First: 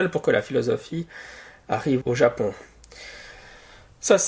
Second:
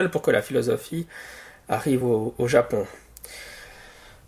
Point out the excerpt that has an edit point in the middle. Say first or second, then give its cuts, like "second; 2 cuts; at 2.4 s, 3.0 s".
first; 1 cut; at 2.0 s